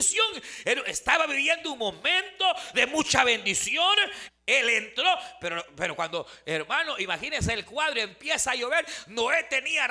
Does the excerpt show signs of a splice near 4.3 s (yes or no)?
yes